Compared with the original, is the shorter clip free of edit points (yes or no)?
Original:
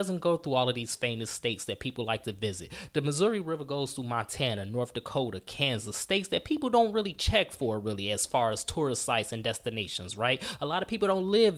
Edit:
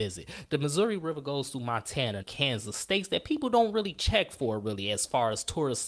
no